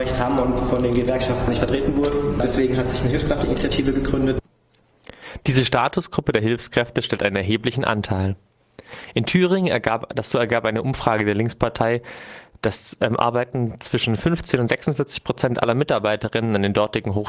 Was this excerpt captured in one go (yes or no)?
yes